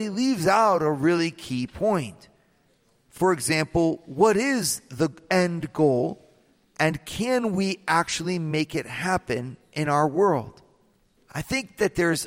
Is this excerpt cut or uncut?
cut